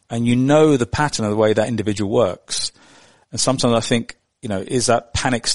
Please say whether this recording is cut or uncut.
uncut